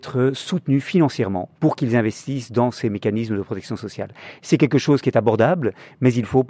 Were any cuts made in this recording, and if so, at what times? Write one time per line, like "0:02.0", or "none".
0:01.5